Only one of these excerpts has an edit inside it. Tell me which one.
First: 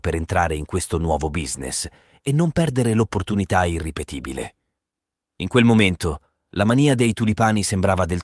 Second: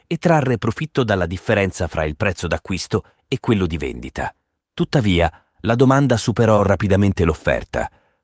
second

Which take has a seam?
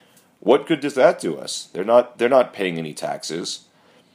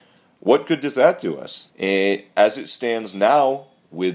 second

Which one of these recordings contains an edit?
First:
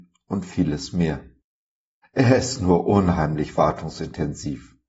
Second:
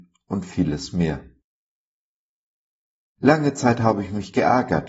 first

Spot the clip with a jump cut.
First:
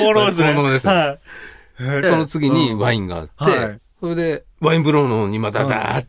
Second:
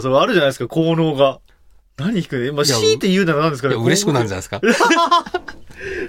first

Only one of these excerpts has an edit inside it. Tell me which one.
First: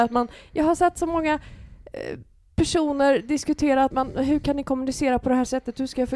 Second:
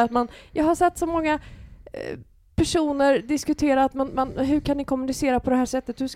first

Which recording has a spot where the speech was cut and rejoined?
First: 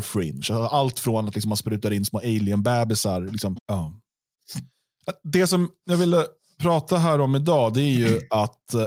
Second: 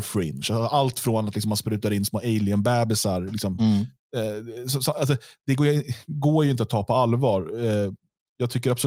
first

